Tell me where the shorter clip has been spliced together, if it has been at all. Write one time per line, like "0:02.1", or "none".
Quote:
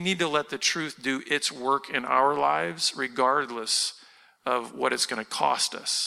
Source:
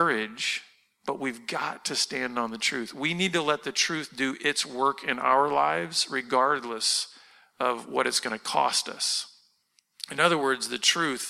none